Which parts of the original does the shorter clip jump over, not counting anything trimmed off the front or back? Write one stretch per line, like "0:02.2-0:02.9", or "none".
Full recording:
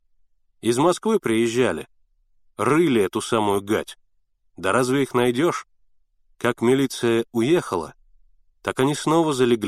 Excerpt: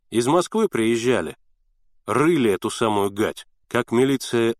0:04.1-0:06.3